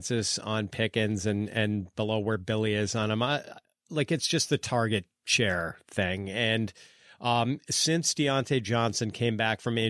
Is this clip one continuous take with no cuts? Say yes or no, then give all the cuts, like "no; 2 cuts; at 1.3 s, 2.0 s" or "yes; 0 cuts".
yes; 0 cuts